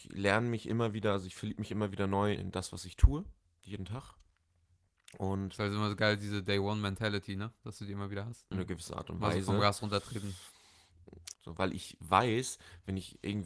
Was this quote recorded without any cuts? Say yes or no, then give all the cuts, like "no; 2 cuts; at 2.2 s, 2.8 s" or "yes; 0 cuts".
no; 3 cuts; at 2.4 s, 8.5 s, 11.3 s